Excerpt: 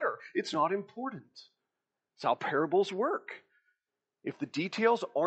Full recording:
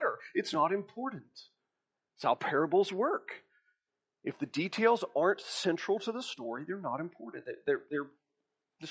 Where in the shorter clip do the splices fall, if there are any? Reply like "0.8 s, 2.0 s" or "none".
none